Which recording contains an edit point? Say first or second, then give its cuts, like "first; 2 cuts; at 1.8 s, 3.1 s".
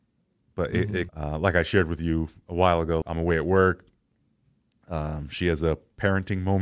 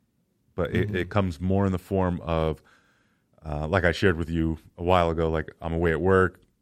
first; 2 cuts; at 1.1 s, 3.0 s